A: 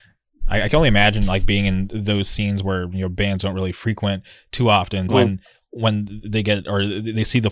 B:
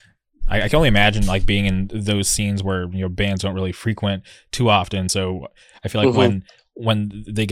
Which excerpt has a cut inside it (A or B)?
A